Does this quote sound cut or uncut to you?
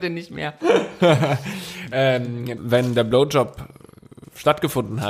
cut